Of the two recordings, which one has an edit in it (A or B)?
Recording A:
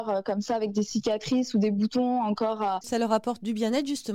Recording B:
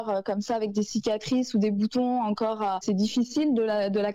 A